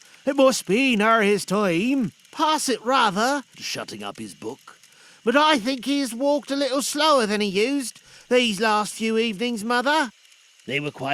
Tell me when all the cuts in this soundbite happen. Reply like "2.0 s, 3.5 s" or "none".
3.5 s